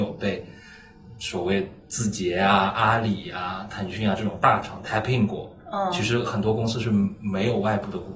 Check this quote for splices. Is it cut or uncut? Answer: uncut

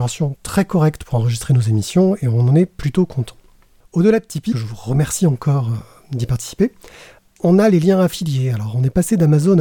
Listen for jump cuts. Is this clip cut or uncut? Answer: cut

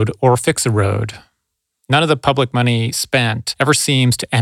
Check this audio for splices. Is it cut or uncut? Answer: uncut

